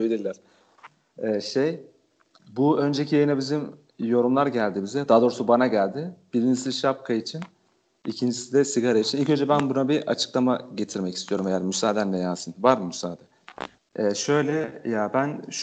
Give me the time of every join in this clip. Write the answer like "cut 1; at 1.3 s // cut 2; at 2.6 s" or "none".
cut 1; at 13.8 s